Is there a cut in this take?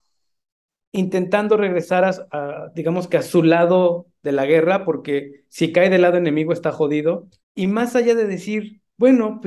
yes; 1 cut; at 7.4 s

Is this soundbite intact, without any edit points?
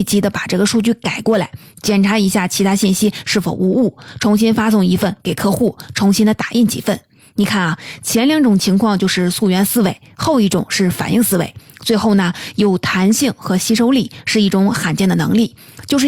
yes; 0 cuts

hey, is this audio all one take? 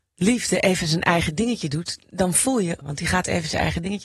no; 1 cut; at 2.8 s

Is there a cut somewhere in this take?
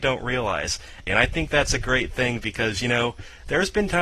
yes; 1 cut; at 1.1 s

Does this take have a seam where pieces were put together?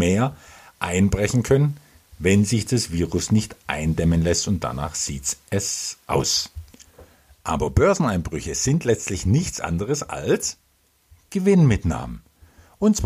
no; 0 cuts

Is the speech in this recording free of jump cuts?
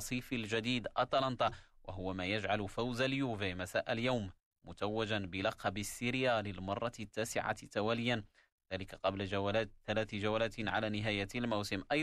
yes; 0 cuts

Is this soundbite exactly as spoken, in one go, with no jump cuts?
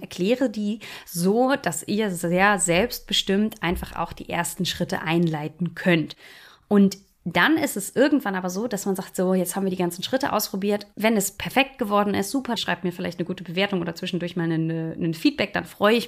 no; 2 cuts; at 10.9 s, 12.6 s

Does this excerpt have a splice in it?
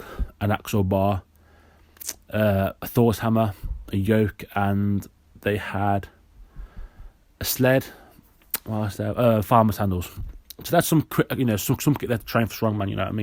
no; 0 cuts

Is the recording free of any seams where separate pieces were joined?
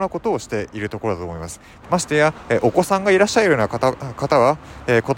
no; 1 cut; at 1.8 s

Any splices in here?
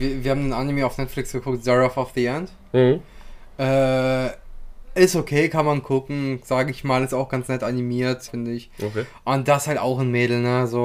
yes; 1 cut; at 8.3 s

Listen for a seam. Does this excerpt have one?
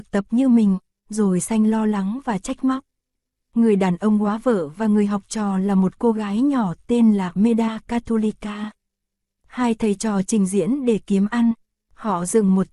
yes; 1 cut; at 3.3 s

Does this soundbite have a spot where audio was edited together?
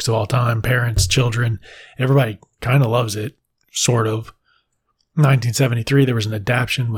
no; 0 cuts

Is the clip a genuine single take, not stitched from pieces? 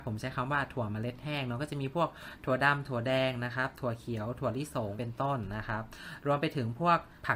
yes; 0 cuts

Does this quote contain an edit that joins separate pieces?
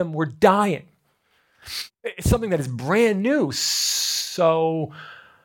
yes; 1 cut; at 1.9 s

